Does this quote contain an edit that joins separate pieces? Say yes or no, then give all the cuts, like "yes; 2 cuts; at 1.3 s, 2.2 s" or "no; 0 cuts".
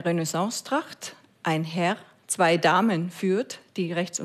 no; 0 cuts